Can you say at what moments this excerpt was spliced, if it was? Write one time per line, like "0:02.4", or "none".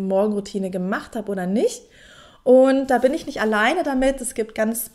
none